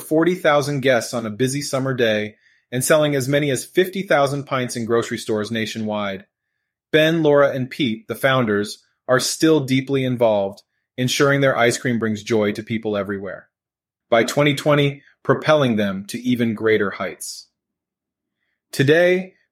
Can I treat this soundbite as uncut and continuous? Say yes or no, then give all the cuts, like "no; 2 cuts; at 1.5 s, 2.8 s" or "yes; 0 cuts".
no; 2 cuts; at 14.0 s, 15.1 s